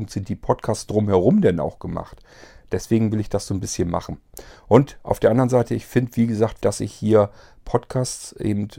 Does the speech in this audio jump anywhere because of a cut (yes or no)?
yes